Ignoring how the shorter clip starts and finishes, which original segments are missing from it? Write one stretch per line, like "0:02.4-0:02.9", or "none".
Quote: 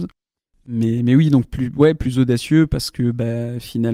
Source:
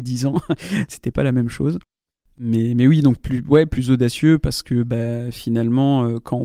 none